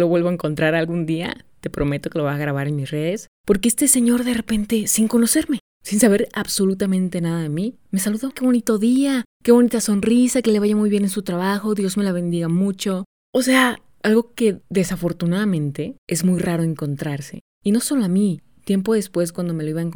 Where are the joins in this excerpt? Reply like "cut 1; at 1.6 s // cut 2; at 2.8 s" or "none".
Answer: cut 1; at 8.3 s // cut 2; at 17.4 s